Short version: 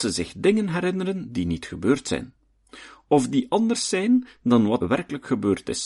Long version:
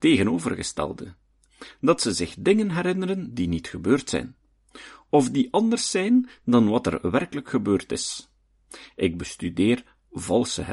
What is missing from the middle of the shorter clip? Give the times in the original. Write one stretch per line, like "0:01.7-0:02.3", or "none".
0:06.8-0:07.0